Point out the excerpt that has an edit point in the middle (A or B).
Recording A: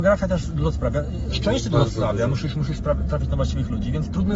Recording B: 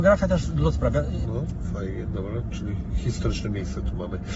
B